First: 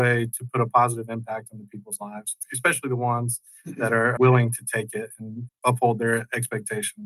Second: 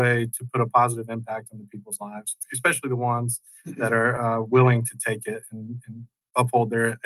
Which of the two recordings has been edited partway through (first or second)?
first